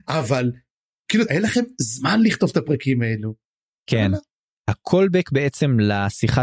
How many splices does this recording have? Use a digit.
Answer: 2